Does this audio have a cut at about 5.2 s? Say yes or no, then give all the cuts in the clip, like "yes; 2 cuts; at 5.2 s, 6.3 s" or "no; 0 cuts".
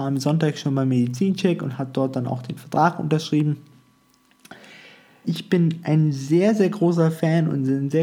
yes; 1 cut; at 5.2 s